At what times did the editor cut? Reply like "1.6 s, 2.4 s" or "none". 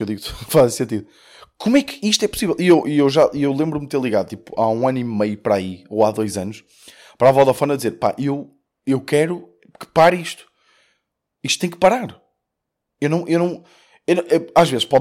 none